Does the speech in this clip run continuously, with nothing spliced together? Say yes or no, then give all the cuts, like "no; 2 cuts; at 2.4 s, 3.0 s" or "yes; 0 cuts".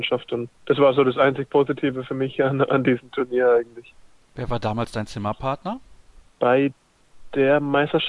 yes; 0 cuts